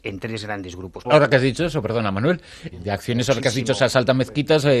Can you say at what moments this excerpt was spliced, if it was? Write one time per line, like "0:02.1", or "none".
0:01.0
0:02.7